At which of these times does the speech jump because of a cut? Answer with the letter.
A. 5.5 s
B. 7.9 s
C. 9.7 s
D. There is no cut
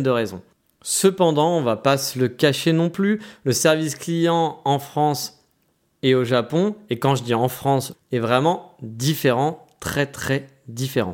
B